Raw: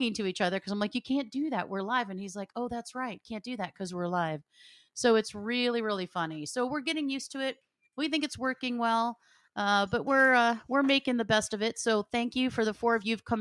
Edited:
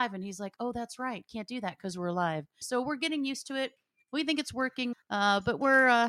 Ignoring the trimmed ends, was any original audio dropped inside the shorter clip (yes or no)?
yes